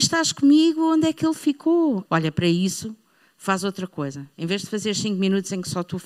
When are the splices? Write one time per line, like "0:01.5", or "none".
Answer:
0:02.1